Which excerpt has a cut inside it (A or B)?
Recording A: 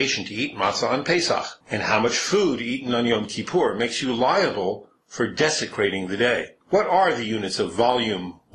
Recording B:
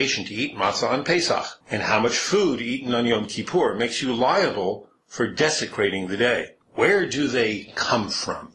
B